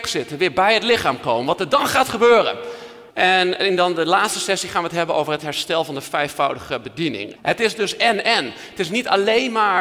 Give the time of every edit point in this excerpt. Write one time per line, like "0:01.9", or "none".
0:03.1
0:07.4